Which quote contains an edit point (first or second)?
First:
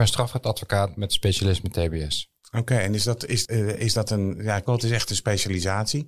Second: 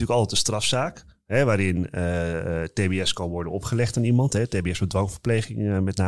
first